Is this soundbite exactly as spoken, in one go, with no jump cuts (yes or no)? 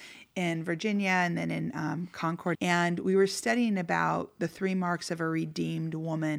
no